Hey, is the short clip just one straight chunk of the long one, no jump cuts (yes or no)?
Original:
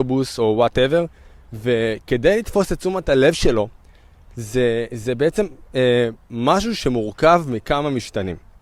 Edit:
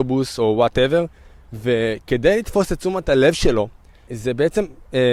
no